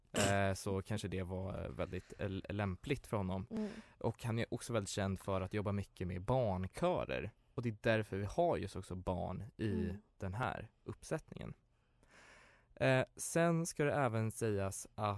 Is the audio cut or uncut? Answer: uncut